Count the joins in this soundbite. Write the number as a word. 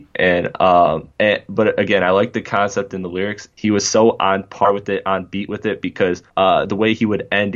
three